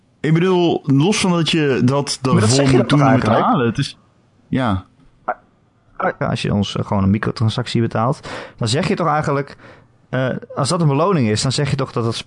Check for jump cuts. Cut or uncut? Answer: cut